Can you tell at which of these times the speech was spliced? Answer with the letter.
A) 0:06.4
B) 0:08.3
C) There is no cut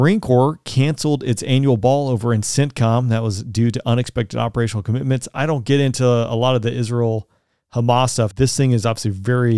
B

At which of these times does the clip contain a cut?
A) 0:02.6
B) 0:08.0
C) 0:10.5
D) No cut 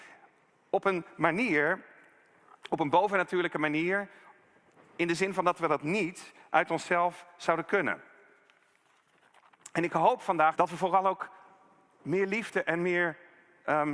C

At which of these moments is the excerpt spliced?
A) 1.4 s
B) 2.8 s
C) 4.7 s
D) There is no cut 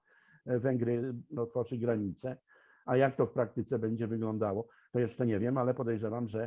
A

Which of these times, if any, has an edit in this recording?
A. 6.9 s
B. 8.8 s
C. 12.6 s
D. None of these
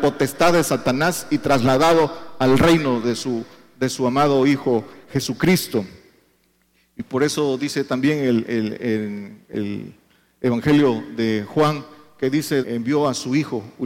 C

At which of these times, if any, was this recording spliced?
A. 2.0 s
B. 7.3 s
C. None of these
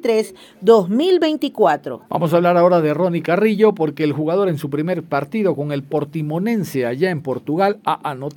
A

